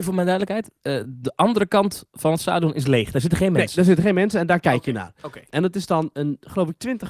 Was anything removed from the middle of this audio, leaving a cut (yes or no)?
no